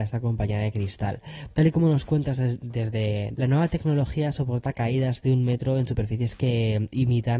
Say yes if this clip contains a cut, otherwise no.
yes